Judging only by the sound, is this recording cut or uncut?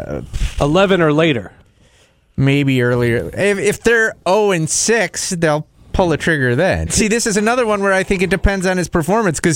cut